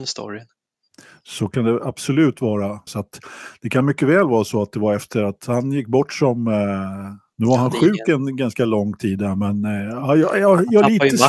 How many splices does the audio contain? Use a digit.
2